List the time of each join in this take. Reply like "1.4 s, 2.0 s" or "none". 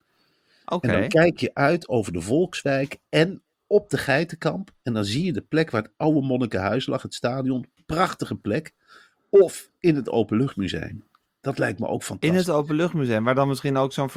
none